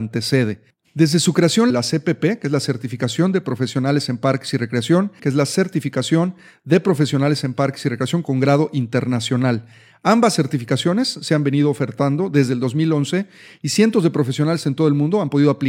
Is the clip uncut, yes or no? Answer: no